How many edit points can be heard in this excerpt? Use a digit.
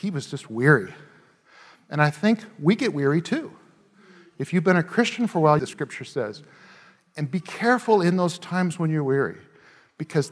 1